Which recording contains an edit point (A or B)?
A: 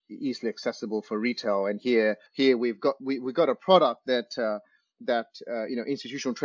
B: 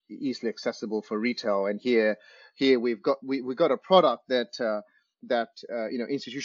A